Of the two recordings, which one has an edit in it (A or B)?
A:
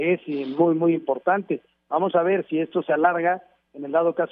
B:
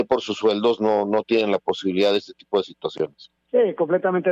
B